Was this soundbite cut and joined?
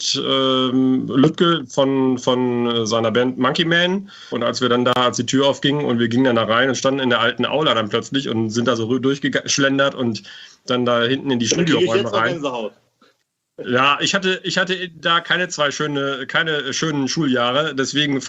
yes; 1 cut; at 4.3 s

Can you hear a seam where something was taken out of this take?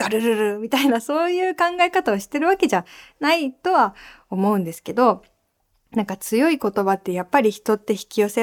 no; 0 cuts

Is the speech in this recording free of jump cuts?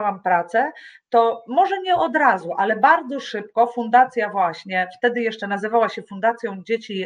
yes; 0 cuts

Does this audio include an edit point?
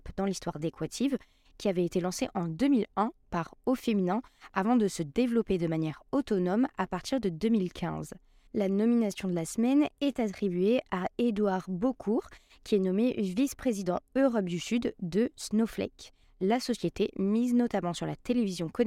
yes; 2 cuts; at 8.5 s, 16.2 s

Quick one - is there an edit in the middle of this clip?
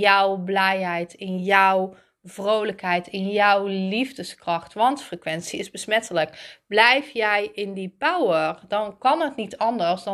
no; 0 cuts

